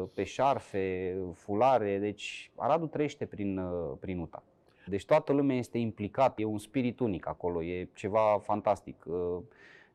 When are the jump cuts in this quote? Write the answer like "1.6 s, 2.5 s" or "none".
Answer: 4.9 s, 6.4 s

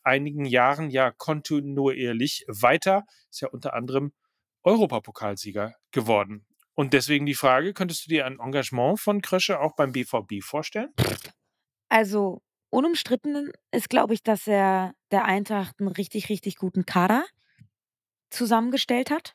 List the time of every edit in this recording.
none

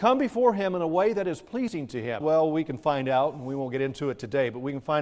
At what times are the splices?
2.2 s

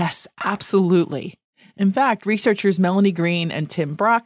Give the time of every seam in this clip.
none

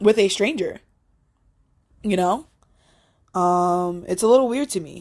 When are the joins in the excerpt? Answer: none

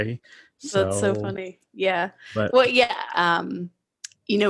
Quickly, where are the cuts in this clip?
3.1 s

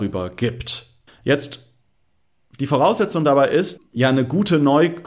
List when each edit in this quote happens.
1.1 s, 3.8 s

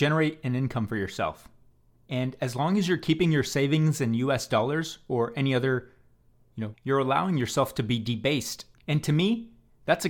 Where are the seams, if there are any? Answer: 6.7 s, 8.7 s

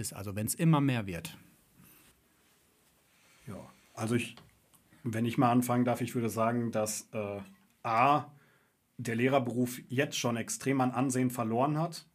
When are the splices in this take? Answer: none

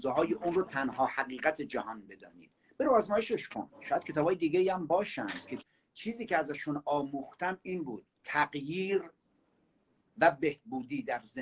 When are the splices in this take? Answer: 8.1 s

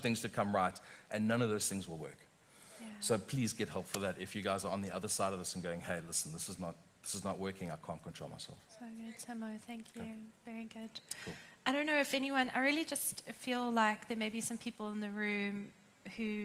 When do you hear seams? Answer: none

